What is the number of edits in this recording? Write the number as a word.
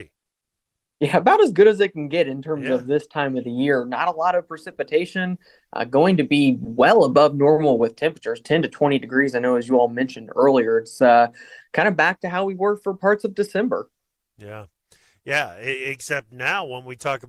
zero